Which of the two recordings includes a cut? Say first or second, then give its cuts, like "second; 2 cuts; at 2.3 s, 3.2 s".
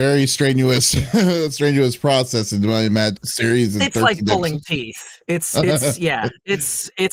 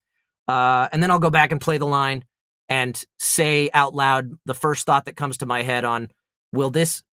first; 1 cut; at 3.2 s